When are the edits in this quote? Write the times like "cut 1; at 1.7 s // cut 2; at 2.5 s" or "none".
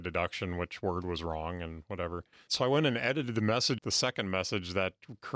cut 1; at 2.5 s // cut 2; at 3.8 s